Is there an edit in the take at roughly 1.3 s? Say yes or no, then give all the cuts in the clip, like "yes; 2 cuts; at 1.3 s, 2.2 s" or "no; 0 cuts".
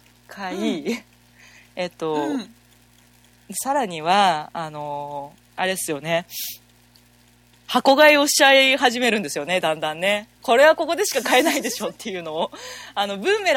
no; 1 cut; at 10.4 s